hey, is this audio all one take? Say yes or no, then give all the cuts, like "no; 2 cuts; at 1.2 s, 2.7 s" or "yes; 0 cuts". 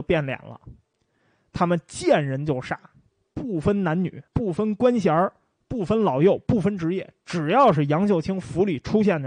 no; 1 cut; at 4.3 s